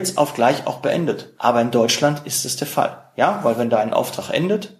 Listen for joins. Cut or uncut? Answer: cut